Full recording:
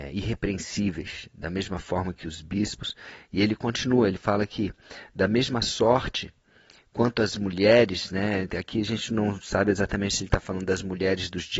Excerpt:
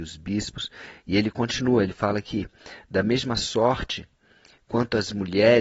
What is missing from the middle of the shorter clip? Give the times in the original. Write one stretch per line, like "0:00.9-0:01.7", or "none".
none